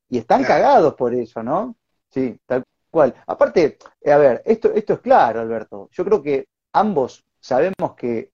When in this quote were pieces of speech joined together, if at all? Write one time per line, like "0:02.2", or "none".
0:02.0